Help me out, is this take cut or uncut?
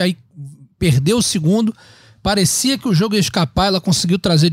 uncut